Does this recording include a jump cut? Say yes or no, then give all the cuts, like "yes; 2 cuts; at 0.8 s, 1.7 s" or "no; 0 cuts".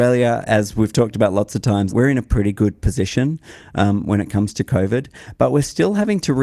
yes; 1 cut; at 1.9 s